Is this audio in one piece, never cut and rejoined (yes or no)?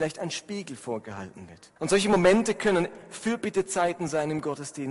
no